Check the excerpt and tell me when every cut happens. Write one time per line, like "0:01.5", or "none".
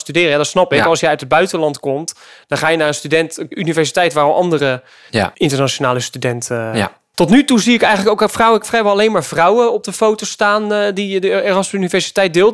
0:07.1
0:08.6